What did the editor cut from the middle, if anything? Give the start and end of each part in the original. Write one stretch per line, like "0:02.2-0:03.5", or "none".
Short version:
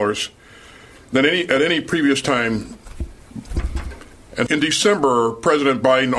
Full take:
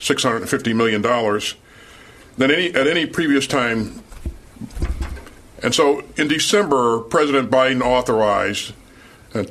0:05.7-0:06.1

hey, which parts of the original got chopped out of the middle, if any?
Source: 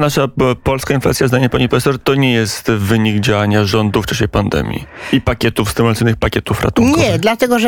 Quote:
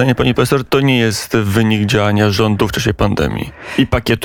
none

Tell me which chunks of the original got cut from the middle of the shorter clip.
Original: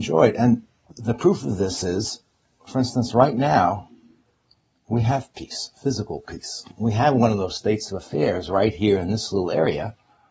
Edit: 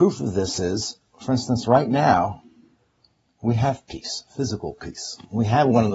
0:02.3-0:02.5

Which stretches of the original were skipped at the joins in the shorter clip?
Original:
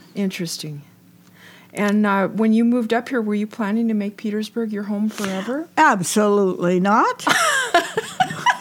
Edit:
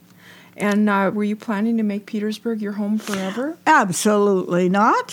0:02.3-0:03.2

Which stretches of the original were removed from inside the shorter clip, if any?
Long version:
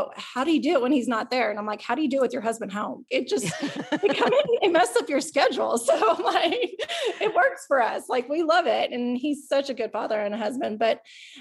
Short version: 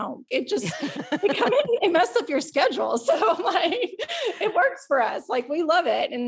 none

